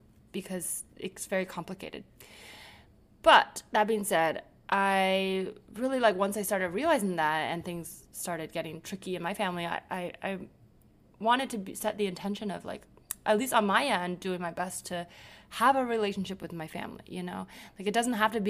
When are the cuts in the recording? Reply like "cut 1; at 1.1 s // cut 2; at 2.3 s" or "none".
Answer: none